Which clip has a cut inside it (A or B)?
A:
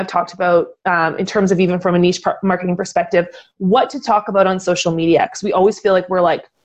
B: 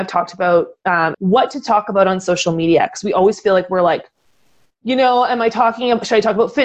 B